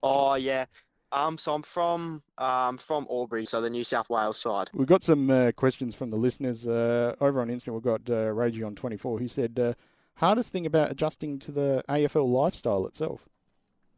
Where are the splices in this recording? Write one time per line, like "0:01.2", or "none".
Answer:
0:04.7

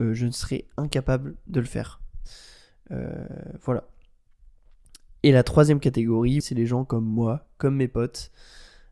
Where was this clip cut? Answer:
0:06.4

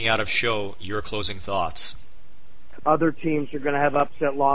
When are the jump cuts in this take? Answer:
0:02.8

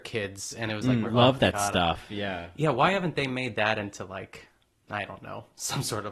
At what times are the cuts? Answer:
0:01.0

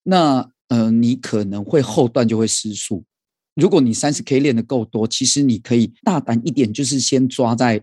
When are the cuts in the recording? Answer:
0:03.5
0:06.0

